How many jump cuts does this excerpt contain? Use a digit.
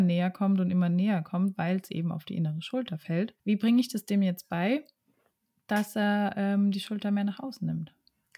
1